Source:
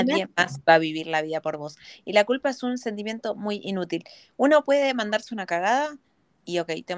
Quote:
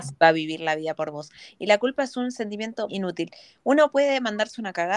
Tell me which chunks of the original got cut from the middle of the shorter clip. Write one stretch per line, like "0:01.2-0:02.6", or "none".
0:03.3-0:03.6